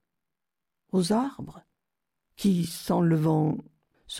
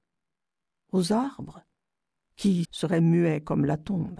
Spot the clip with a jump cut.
second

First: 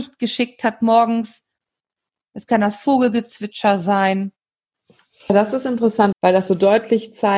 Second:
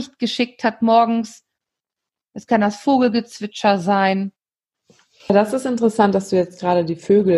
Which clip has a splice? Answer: first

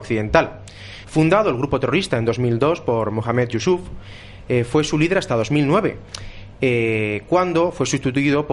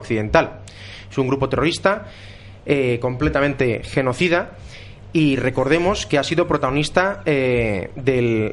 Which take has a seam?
first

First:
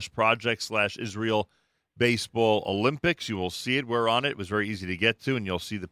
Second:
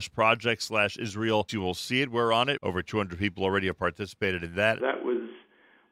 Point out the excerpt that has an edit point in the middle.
second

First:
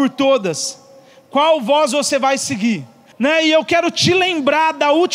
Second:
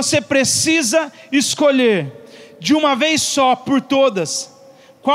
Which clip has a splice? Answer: first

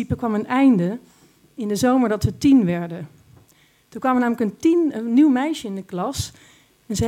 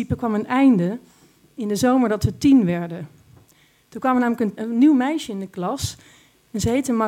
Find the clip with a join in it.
second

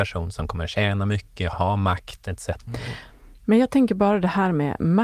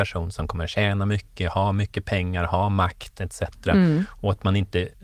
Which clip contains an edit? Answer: first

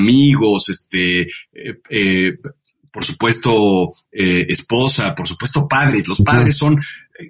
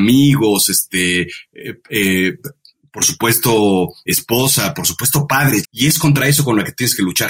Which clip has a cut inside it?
second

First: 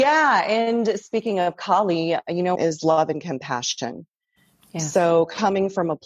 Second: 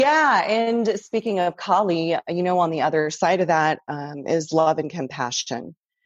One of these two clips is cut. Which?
first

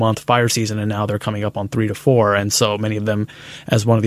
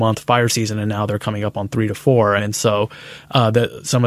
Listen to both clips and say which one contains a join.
second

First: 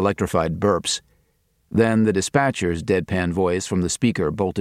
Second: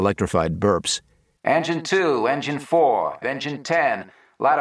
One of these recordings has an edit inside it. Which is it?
second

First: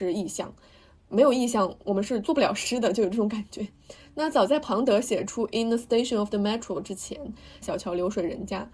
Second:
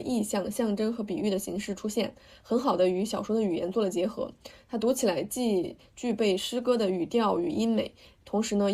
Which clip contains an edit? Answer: first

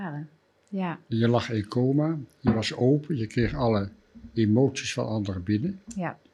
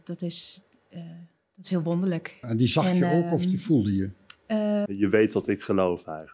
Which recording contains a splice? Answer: second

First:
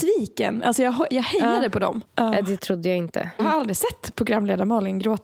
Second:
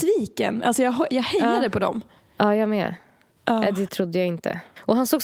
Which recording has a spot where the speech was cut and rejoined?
first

